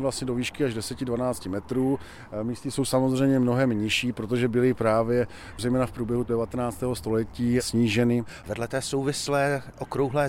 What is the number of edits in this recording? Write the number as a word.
one